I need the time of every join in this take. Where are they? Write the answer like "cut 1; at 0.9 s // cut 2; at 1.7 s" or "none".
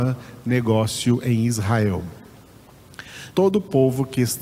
cut 1; at 3.3 s

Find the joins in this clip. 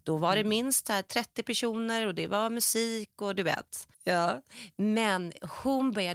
cut 1; at 3.9 s

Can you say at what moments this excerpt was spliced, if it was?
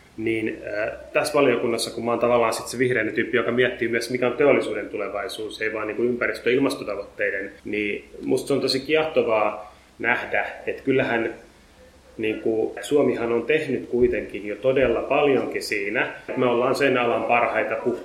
cut 1; at 7.6 s // cut 2; at 12.8 s // cut 3; at 16.3 s

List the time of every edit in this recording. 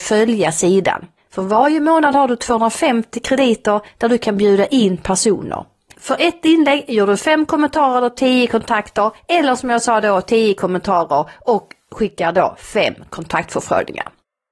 cut 1; at 5.9 s

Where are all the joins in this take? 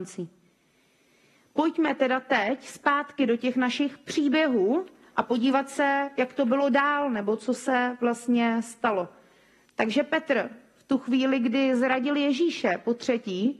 cut 1; at 6.2 s

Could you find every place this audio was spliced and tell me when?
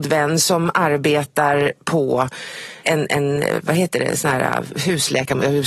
none

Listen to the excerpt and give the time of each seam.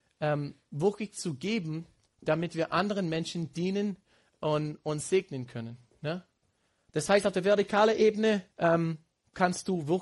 cut 1; at 6.9 s // cut 2; at 8.5 s

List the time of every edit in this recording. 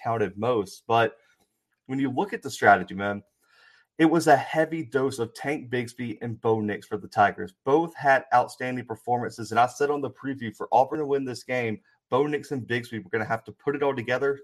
none

